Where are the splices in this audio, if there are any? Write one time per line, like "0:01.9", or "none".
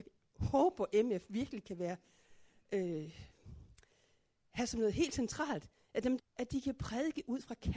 0:06.2